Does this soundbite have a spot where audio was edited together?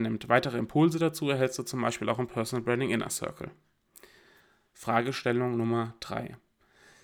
no; 0 cuts

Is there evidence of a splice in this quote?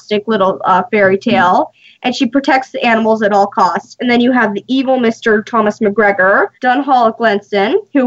yes; 1 cut; at 6.5 s

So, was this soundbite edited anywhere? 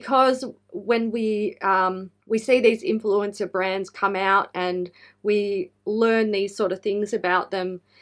yes; 1 cut; at 2.2 s

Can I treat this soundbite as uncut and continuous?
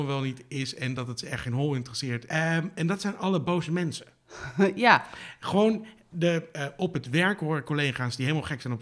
no; 1 cut; at 2.3 s

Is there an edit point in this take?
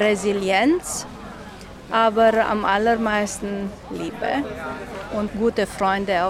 no; 0 cuts

